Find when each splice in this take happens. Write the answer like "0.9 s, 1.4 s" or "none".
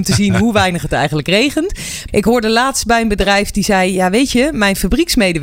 2.1 s